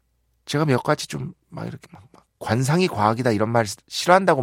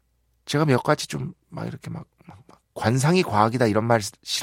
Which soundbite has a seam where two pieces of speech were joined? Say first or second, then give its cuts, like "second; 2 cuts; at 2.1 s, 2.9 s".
first; 1 cut; at 1.8 s